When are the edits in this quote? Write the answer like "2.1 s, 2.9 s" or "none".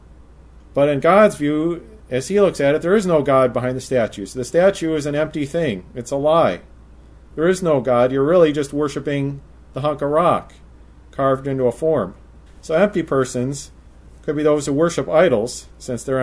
12.5 s